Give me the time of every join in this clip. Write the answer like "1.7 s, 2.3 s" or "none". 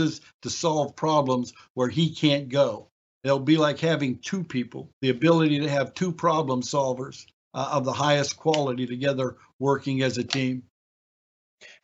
4.9 s